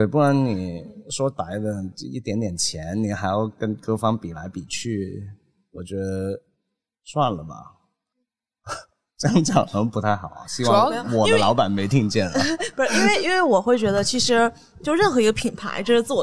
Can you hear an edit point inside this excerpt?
no; 0 cuts

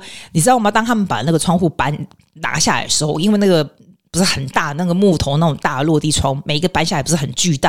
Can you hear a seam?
no; 0 cuts

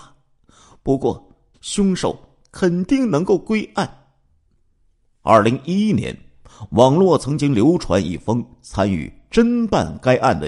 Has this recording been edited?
yes; 1 cut; at 1.5 s

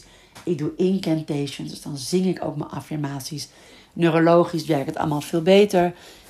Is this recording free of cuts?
yes; 0 cuts

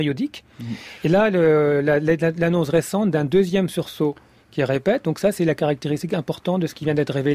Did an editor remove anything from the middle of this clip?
no; 0 cuts

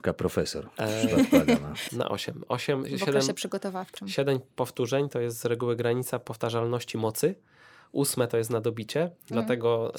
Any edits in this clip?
yes; 1 cut; at 1.9 s

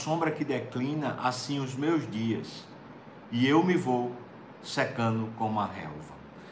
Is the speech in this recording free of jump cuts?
yes; 0 cuts

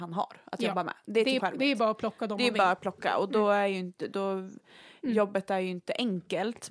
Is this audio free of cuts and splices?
no; 1 cut; at 1.4 s

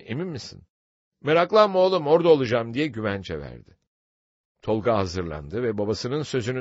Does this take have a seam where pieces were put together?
yes; 1 cut; at 4.4 s

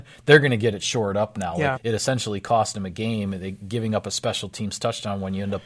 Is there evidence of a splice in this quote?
yes; 1 cut; at 1.7 s

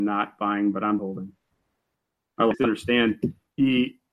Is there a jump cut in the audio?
yes; 2 cuts; at 1.0 s, 2.5 s

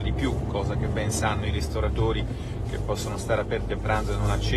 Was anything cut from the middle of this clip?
no; 0 cuts

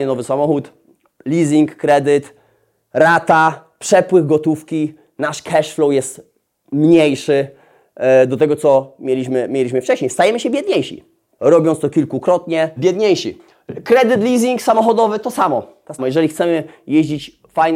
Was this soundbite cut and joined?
yes; 3 cuts; at 11.3 s, 12.8 s, 16.0 s

